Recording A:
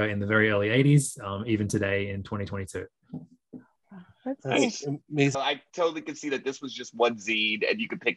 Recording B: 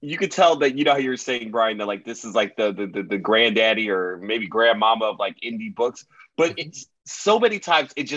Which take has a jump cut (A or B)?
A